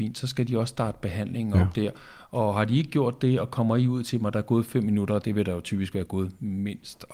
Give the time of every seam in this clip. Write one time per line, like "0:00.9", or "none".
none